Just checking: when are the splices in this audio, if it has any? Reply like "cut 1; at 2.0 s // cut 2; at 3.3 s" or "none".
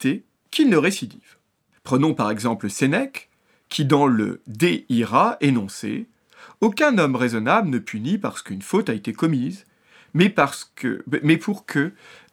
cut 1; at 1.7 s

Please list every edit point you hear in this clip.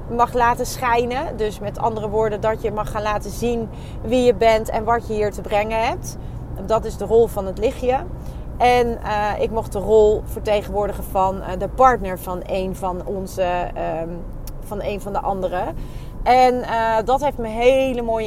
none

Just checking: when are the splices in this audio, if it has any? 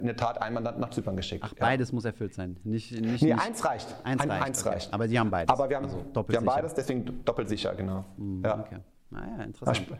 none

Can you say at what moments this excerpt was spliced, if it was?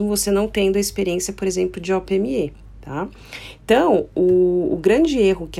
none

